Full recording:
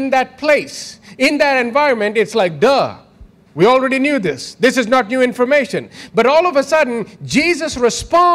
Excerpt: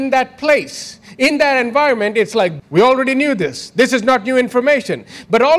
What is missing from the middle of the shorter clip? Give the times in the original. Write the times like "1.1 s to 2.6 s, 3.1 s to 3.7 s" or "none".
2.6 s to 3.4 s